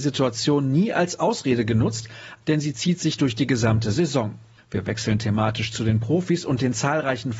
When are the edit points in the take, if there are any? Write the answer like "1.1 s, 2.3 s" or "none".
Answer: 2.4 s, 4.6 s